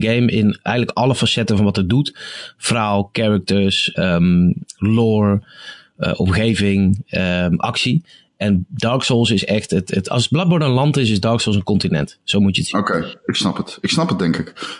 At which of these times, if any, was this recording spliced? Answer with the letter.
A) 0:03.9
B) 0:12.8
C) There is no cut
A